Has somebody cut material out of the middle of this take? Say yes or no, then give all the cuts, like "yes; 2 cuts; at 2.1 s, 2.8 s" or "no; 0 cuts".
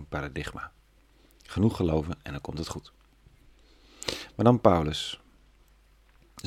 no; 0 cuts